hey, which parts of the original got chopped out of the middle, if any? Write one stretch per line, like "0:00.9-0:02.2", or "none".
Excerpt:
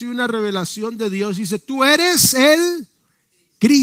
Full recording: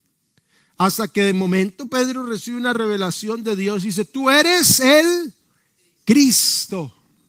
none